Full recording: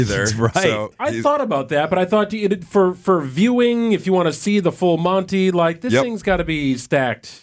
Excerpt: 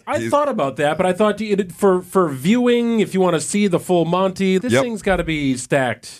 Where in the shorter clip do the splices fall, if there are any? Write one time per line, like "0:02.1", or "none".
0:04.6